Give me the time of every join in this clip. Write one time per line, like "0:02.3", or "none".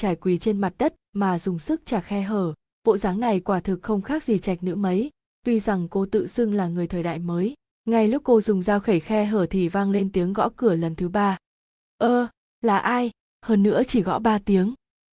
none